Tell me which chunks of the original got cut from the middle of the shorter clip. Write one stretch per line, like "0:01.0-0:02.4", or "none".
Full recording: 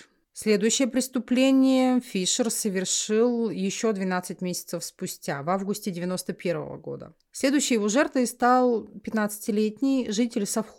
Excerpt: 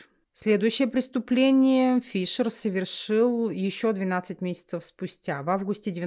none